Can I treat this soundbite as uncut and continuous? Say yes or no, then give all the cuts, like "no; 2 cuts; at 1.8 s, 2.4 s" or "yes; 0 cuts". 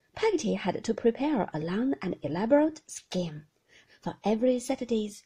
no; 1 cut; at 3.9 s